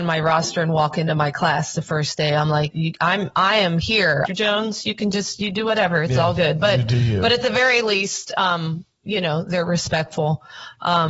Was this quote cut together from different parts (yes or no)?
yes